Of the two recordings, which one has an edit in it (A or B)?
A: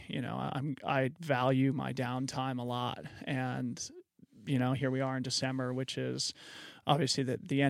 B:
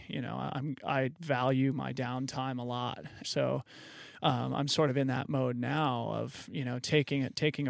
B